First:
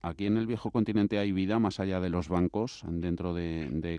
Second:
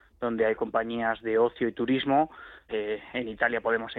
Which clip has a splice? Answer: second; 1 cut; at 2.7 s

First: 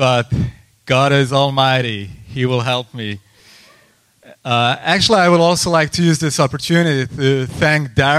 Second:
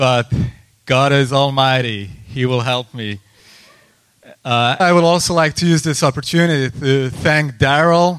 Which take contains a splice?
second; 1 cut; at 4.8 s

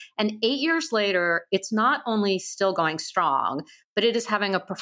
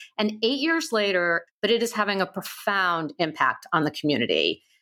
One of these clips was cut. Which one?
second; 1 cut; at 1.5 s

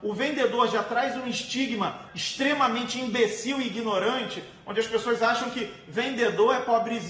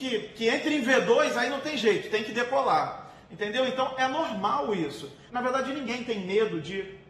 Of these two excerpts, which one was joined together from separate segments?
second; 1 cut; at 5.3 s

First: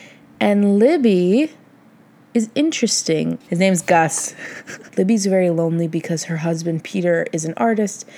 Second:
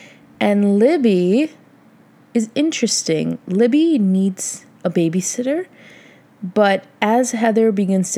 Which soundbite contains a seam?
first; 2 cuts; at 3.4 s, 4.9 s

